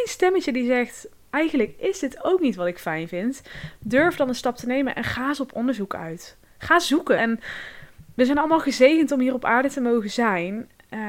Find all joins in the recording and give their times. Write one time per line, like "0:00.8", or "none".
0:01.3
0:07.2

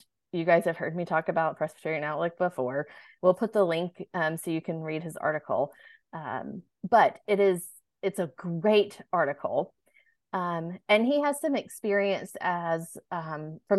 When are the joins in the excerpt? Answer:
none

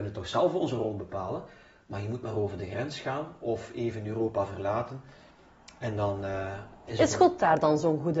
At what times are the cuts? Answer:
none

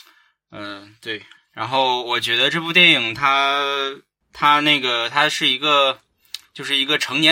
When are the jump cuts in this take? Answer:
0:01.3

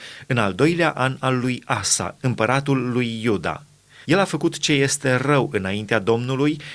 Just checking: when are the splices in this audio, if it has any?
0:04.0

